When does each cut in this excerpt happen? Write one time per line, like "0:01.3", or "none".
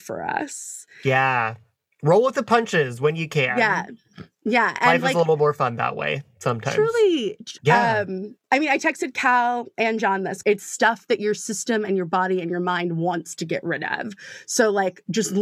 0:07.6
0:10.4